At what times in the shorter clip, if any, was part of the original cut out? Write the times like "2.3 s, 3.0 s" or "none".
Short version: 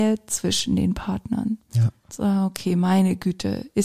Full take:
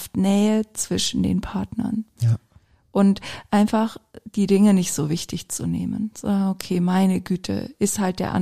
2.1 s